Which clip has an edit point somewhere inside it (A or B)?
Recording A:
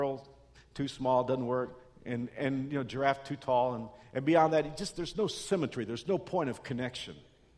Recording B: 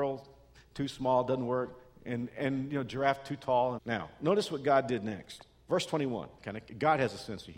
B